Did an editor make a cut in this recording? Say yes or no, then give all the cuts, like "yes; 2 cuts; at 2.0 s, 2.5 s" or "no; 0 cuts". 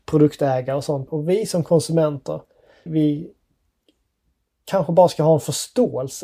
yes; 2 cuts; at 1.1 s, 2.9 s